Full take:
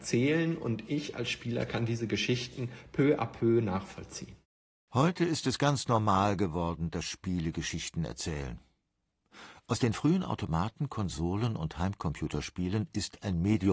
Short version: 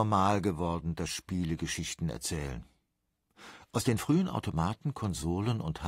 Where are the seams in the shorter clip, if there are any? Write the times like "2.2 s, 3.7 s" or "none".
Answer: none